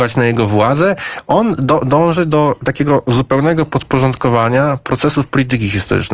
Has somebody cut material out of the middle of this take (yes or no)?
no